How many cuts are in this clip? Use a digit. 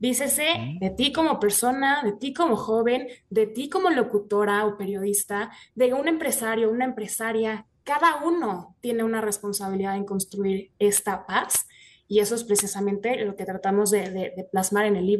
0